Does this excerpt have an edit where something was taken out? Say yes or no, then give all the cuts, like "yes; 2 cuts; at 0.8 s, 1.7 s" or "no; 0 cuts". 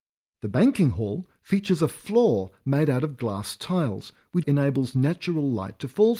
yes; 2 cuts; at 1.4 s, 4.4 s